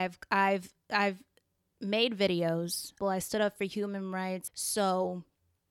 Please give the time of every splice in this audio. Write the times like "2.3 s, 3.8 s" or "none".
3.0 s, 4.5 s